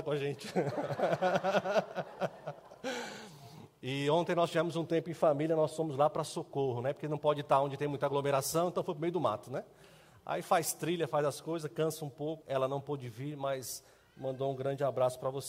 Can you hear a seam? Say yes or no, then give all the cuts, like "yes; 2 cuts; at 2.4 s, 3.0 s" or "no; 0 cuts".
yes; 1 cut; at 12.4 s